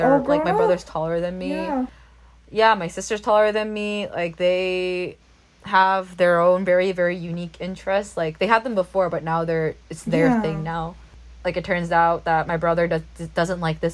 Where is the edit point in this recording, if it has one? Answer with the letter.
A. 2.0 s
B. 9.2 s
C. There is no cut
C